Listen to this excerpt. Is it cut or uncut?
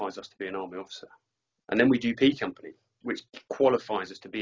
cut